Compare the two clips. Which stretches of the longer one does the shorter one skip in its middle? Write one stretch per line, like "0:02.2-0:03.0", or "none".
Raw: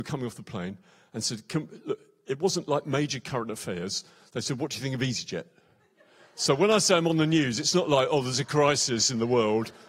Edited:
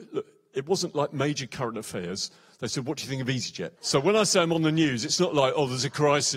0:05.5-0:06.3